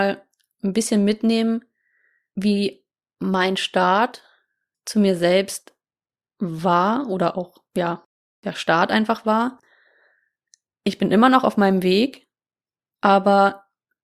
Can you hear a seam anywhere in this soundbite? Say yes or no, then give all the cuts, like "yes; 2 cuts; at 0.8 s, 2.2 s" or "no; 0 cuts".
no; 0 cuts